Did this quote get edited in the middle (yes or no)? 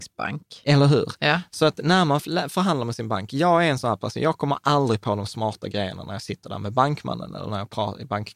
no